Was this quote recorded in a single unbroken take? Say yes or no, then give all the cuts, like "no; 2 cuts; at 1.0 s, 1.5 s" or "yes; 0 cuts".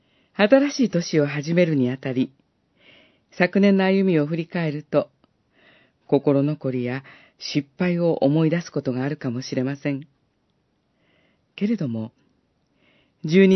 yes; 0 cuts